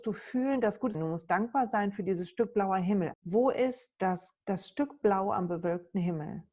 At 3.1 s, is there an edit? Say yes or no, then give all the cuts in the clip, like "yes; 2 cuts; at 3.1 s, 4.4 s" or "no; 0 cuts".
yes; 3 cuts; at 0.9 s, 3.1 s, 4.4 s